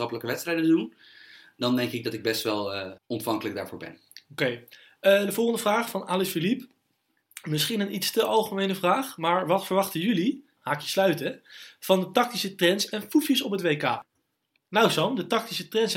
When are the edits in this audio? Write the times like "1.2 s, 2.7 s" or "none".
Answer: 3.0 s, 10.6 s